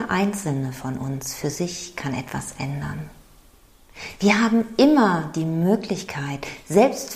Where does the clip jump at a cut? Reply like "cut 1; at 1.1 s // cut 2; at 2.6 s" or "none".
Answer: none

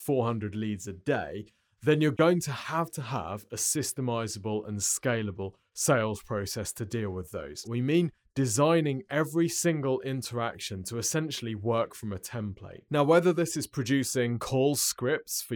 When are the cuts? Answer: cut 1; at 7.6 s

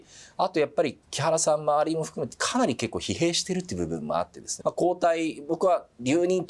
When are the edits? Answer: cut 1; at 1.0 s // cut 2; at 4.6 s

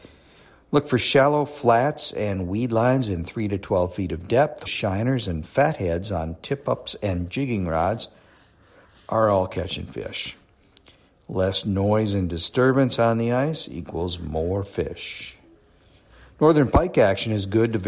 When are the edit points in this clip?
cut 1; at 4.6 s

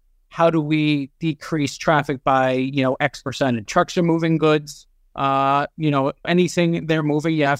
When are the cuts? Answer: cut 1; at 3.7 s // cut 2; at 6.2 s

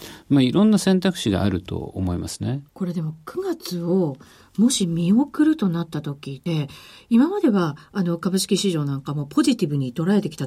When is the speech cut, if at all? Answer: cut 1; at 2.7 s // cut 2; at 6.5 s

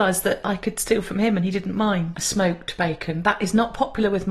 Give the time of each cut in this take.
cut 1; at 2.1 s

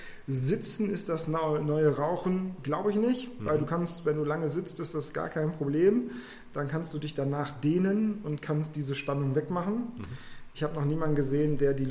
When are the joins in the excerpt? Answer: none

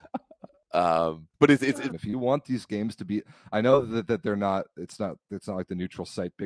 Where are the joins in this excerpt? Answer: cut 1; at 1.9 s

